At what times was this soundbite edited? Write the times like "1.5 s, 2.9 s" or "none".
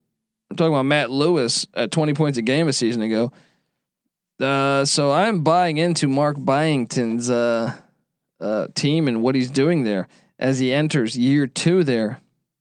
none